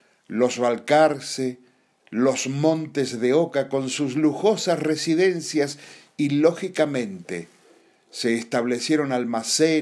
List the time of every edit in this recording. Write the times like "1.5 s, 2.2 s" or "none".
2.0 s